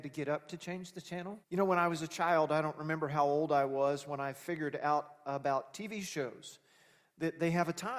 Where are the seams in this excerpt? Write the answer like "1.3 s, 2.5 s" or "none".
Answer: 1.4 s